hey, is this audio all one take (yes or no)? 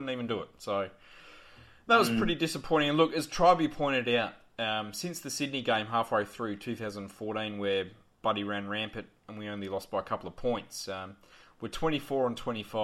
yes